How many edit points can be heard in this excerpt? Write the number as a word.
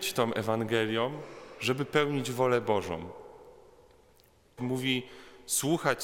one